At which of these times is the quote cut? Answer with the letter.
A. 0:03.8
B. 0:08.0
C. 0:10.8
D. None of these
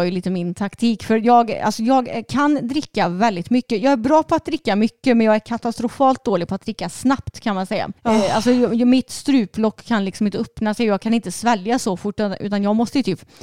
B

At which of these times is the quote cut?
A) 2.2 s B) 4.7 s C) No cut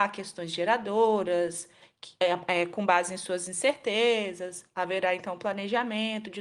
C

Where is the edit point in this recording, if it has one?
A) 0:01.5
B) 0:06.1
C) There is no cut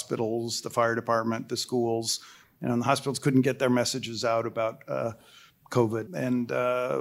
B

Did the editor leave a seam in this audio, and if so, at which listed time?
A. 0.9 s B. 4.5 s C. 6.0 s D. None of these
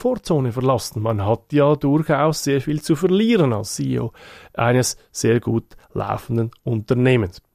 D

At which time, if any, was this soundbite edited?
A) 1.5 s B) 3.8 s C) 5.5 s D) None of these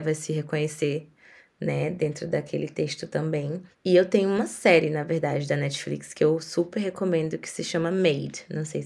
D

